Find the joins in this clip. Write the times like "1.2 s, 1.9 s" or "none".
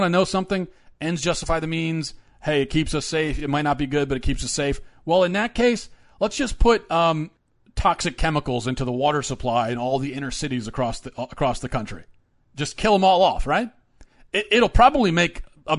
none